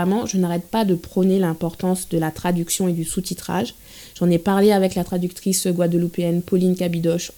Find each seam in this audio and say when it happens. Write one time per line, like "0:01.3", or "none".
none